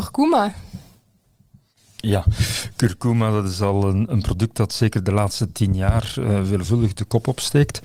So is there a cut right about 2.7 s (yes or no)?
no